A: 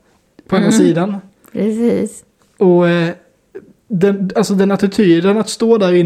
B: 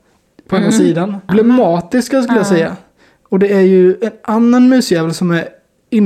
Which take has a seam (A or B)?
B